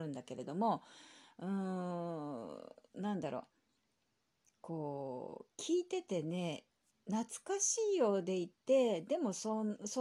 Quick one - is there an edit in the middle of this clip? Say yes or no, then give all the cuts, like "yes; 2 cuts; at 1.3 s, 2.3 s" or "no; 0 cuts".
no; 0 cuts